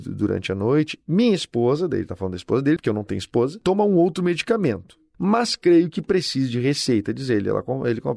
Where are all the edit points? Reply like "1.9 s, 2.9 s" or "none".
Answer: 2.8 s, 5.1 s